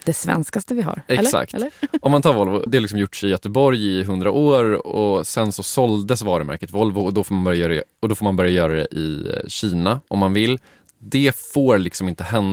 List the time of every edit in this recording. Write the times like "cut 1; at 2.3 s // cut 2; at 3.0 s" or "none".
cut 1; at 2.7 s

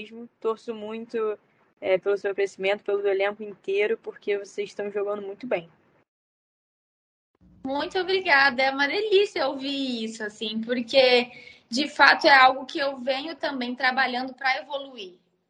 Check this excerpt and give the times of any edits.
none

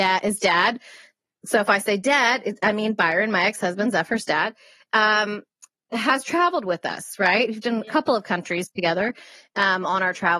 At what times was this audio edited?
none

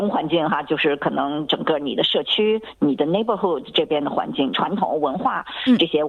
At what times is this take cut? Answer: cut 1; at 4.5 s

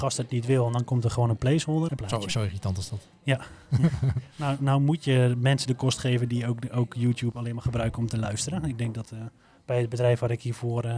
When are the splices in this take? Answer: cut 1; at 1.9 s

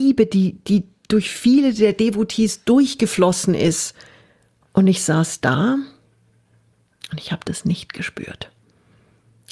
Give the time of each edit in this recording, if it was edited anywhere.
none

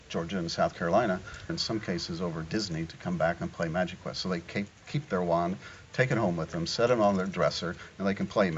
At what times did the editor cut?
cut 1; at 1.5 s

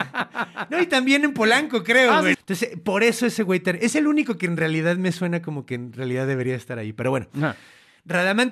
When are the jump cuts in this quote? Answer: cut 1; at 2.3 s

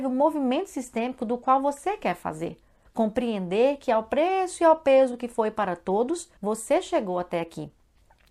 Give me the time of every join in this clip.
cut 1; at 2.8 s // cut 2; at 6.4 s

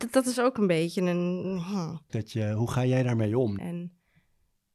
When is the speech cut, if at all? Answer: cut 1; at 2.1 s // cut 2; at 3.6 s

